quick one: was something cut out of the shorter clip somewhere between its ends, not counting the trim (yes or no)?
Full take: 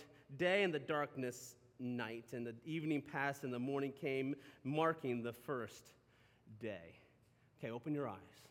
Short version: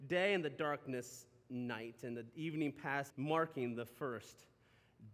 yes